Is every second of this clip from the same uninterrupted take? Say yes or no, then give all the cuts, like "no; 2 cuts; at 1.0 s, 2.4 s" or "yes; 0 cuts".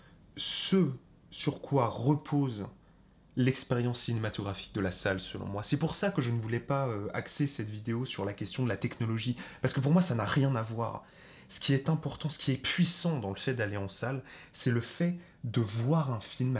yes; 0 cuts